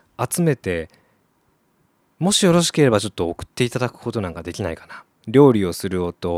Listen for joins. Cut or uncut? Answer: cut